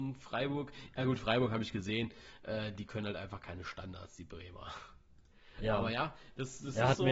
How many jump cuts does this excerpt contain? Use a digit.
0